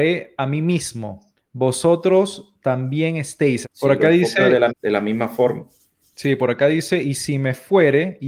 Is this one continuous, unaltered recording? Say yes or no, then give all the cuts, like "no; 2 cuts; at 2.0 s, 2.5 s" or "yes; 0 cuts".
no; 3 cuts; at 1.4 s, 3.6 s, 4.7 s